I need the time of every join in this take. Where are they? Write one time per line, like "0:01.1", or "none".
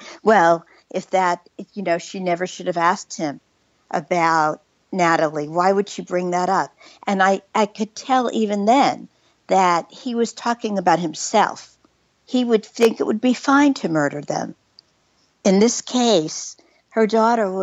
0:12.1
0:15.3